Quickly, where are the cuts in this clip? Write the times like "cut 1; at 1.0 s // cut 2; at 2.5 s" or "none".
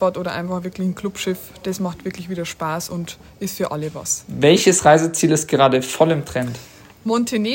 none